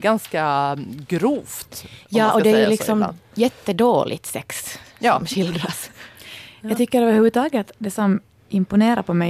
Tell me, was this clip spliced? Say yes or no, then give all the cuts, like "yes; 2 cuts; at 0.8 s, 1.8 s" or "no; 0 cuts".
no; 0 cuts